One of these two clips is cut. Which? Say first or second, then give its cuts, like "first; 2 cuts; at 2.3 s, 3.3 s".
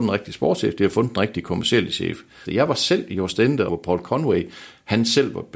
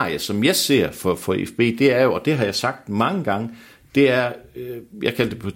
first; 2 cuts; at 2.4 s, 3.7 s